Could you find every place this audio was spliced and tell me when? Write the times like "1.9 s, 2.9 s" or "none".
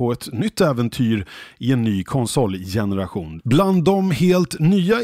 3.4 s